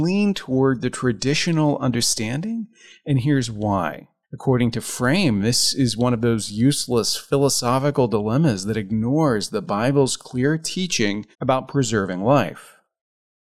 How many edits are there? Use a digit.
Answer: 2